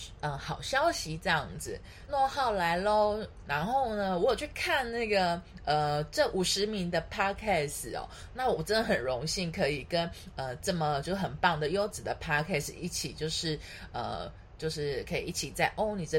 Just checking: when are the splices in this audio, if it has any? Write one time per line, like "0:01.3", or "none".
0:02.1
0:03.4

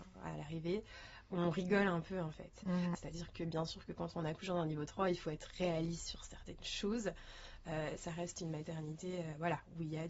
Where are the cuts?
0:02.9

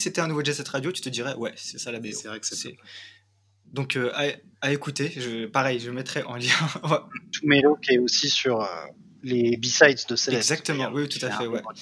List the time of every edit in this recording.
none

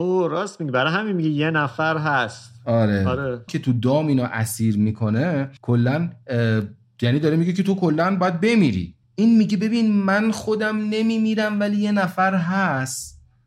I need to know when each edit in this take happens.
0:03.5
0:05.6
0:09.0

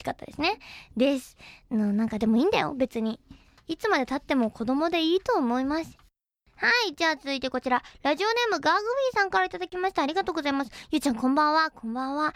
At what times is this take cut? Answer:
none

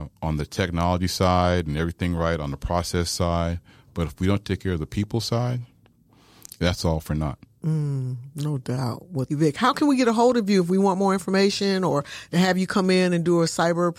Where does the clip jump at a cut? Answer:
0:09.3

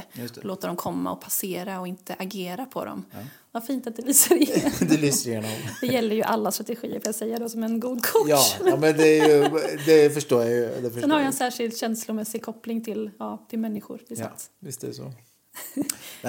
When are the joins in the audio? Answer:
0:03.5

